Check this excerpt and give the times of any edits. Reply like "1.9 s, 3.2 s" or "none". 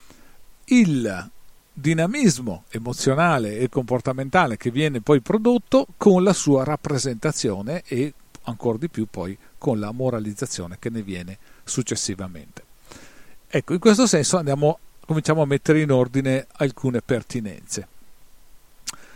none